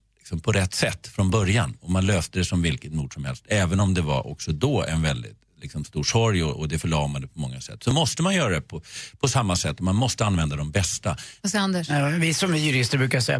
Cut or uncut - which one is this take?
cut